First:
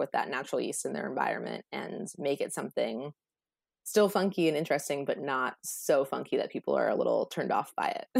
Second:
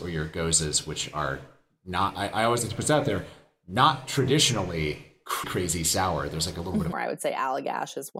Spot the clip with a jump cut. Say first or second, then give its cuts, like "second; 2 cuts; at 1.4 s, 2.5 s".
second; 2 cuts; at 5.4 s, 6.9 s